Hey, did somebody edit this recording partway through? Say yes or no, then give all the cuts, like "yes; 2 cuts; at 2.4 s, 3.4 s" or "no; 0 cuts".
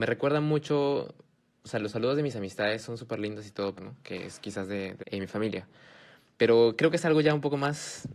yes; 2 cuts; at 3.8 s, 5.0 s